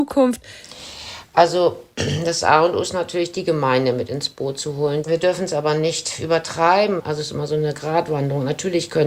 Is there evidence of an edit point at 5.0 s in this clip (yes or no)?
yes